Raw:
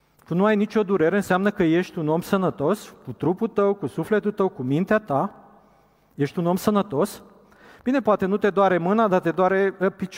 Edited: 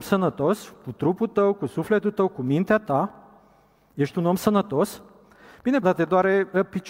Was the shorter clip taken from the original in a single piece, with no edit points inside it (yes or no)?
no